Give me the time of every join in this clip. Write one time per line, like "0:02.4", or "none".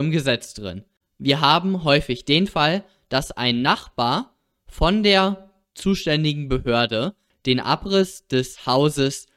0:01.0